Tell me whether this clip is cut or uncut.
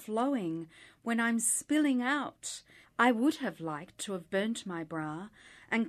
cut